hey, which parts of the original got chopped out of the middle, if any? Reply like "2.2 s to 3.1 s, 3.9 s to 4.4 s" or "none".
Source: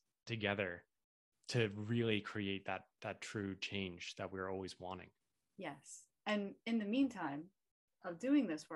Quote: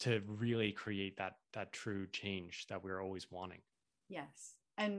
none